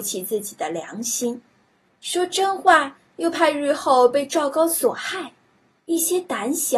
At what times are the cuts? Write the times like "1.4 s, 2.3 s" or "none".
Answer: 5.8 s

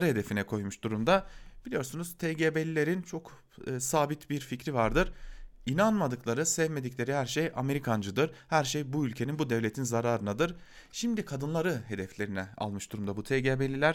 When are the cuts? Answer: none

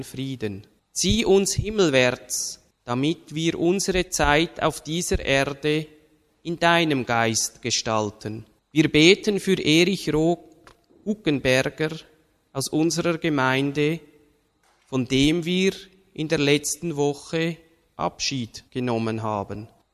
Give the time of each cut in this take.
8.6 s, 18.7 s

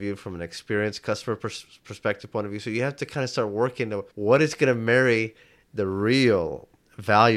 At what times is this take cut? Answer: 4.1 s

